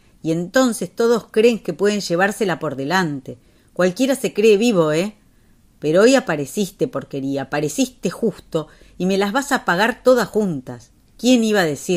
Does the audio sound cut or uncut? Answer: uncut